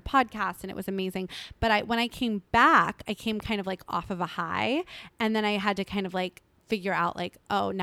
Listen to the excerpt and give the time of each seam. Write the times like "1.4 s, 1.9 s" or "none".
none